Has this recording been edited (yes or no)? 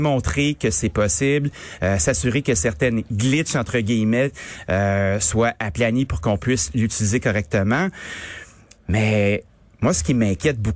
no